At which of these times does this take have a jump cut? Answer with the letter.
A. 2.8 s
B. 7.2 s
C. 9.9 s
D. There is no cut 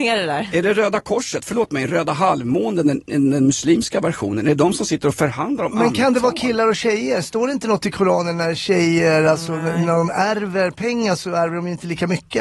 D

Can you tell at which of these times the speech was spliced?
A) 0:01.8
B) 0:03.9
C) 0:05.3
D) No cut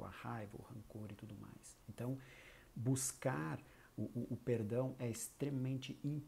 A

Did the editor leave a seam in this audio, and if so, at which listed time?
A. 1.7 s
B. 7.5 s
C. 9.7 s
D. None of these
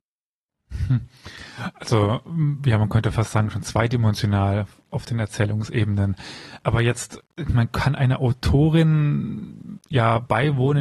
D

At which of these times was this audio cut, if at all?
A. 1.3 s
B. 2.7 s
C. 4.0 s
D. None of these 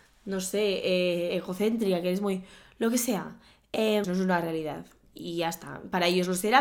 C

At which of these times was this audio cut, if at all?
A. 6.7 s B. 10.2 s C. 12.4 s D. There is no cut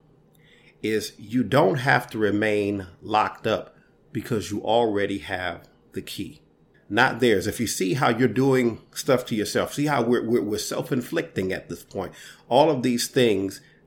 A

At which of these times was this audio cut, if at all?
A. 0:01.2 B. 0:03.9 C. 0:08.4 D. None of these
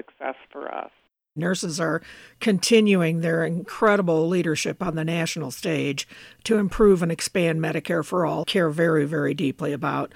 C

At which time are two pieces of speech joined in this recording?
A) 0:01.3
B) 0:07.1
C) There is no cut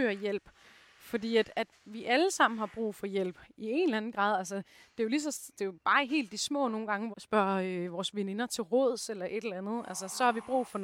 B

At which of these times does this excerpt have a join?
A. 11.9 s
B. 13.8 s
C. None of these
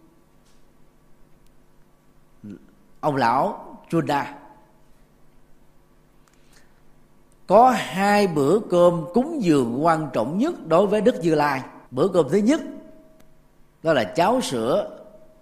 A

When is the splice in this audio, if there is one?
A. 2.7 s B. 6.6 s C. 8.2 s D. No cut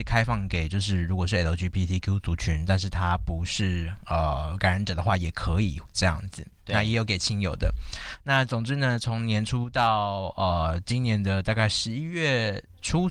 D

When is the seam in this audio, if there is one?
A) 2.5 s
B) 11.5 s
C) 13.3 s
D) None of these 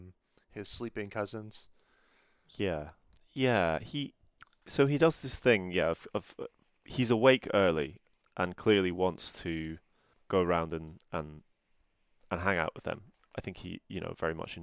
D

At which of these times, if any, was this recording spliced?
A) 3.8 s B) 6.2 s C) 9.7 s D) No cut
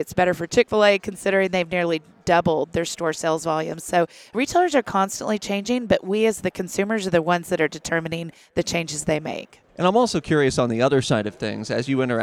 C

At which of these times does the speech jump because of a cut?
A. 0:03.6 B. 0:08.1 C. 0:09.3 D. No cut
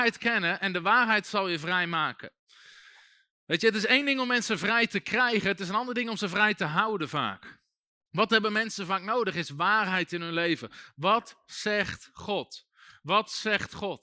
B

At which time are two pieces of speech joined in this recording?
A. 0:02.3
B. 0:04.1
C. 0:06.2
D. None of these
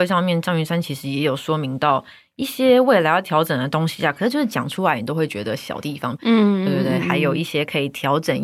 C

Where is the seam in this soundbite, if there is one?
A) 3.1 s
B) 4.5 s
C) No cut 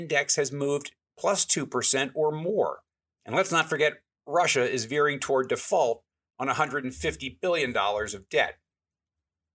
A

